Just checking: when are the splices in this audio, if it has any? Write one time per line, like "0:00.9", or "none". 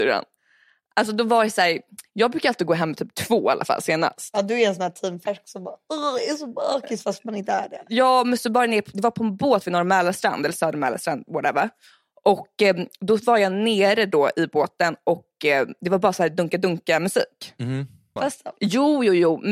0:18.2